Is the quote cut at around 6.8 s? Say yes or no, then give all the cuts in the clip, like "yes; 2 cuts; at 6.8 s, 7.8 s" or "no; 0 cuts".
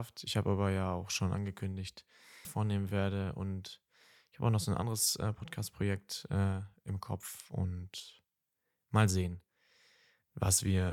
no; 1 cut; at 2.4 s